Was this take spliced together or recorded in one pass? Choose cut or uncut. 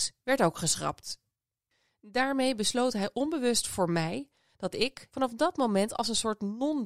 cut